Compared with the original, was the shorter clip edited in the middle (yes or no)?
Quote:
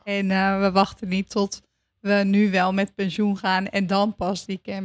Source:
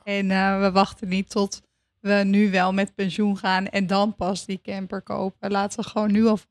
no